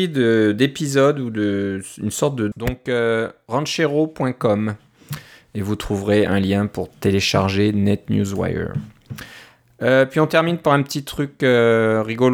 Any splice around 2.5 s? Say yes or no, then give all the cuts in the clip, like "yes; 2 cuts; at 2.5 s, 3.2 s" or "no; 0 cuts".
yes; 1 cut; at 2.5 s